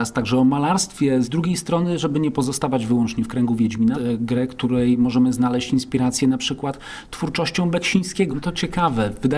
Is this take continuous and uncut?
no; 3 cuts; at 1.2 s, 3.9 s, 8.3 s

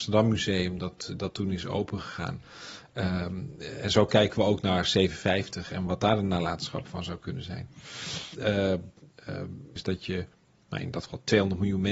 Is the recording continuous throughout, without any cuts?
no; 2 cuts; at 8.3 s, 9.8 s

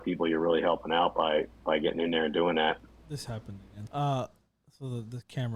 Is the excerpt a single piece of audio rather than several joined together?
no; 1 cut; at 3.9 s

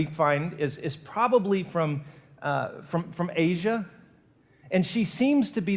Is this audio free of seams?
yes; 0 cuts

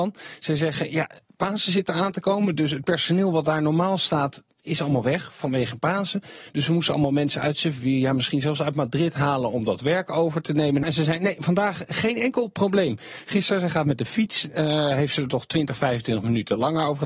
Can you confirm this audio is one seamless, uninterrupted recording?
no; 1 cut; at 10.8 s

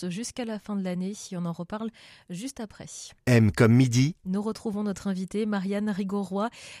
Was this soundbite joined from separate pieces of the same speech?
yes; 1 cut; at 4.2 s

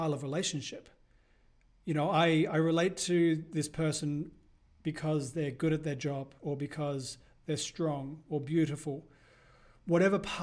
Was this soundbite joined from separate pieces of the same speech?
yes; 1 cut; at 6.4 s

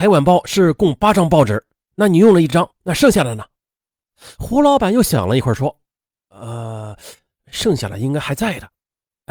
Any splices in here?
no; 0 cuts

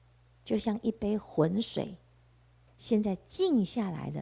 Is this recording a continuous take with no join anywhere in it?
no; 1 cut; at 2.7 s

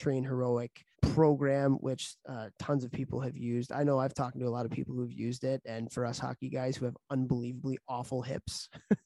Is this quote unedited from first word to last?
no; 1 cut; at 0.9 s

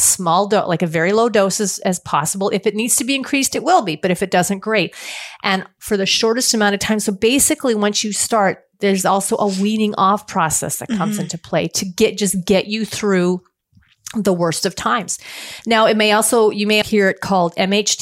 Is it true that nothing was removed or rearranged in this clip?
no; 1 cut; at 16.8 s

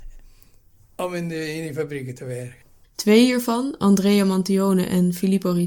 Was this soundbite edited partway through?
yes; 1 cut; at 2.8 s

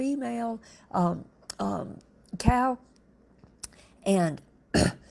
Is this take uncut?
yes; 0 cuts

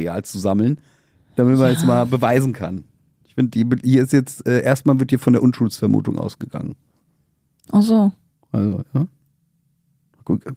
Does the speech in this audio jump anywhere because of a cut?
no; 0 cuts

